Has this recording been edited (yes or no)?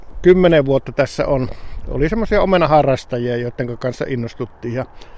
no